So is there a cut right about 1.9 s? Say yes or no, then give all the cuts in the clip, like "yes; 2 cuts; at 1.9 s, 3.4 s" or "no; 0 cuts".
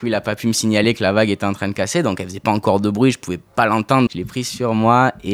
no; 1 cut; at 4.1 s